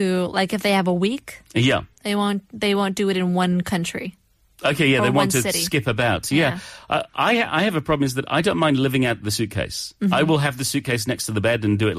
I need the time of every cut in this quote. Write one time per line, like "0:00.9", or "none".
none